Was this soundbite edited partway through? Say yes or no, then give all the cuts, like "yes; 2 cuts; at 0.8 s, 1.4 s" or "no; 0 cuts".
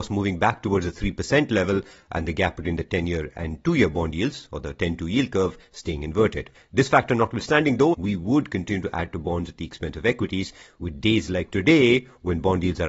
yes; 2 cuts; at 6.5 s, 7.9 s